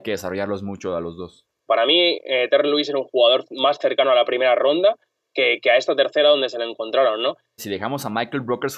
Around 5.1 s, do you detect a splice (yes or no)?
no